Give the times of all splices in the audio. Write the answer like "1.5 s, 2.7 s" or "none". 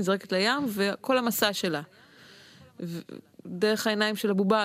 none